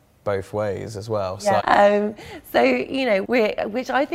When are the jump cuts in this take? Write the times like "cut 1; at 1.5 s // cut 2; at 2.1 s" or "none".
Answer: cut 1; at 1.6 s // cut 2; at 3.2 s